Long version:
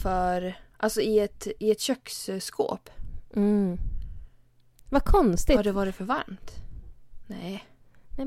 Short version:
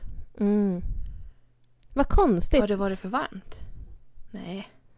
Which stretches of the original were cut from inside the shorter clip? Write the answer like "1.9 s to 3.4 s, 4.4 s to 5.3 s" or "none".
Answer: none

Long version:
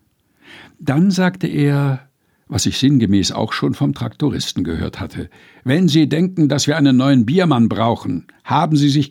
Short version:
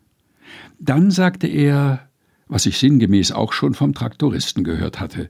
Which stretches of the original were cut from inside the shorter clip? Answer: none

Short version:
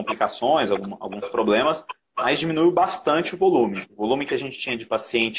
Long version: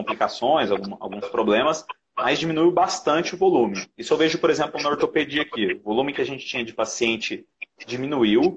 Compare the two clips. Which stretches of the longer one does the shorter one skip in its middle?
3.9 s to 5.8 s

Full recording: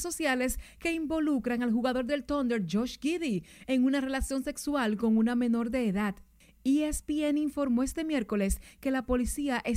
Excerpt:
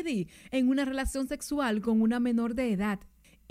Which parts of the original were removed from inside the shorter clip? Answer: none

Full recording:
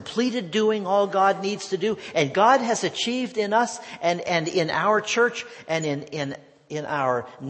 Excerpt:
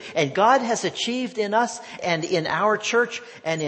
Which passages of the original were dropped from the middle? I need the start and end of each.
4.0 s to 4.2 s

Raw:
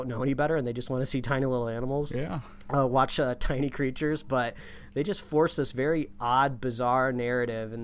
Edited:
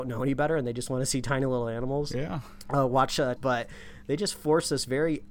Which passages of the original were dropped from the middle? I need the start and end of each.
3.4 s to 4.2 s

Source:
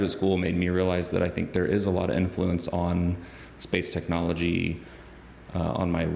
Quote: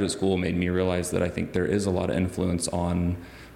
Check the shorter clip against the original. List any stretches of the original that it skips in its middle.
none

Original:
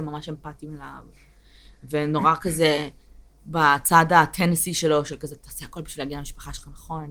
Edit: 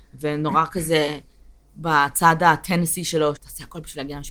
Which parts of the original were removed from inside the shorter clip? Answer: 5.0 s to 5.4 s

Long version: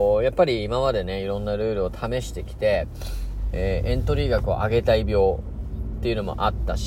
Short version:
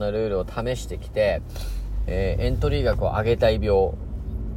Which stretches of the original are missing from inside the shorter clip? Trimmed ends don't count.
none

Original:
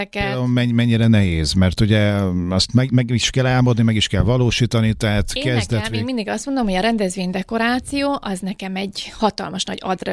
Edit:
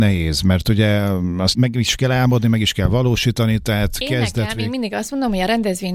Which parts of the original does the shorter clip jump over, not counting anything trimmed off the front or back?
2.7 s to 2.9 s

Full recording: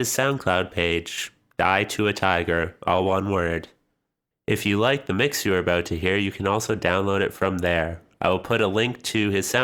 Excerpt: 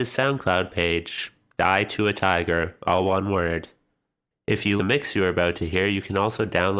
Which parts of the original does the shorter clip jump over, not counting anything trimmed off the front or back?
4.8 s to 5.1 s

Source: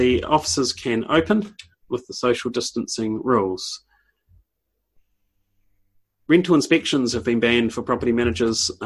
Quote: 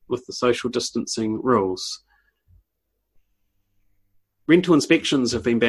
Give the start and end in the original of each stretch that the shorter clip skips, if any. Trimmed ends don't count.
none

